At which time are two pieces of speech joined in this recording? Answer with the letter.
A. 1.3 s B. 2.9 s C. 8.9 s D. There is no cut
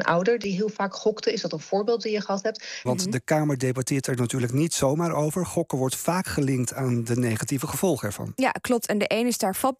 B